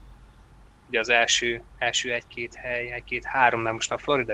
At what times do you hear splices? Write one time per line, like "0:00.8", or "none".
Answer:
0:01.7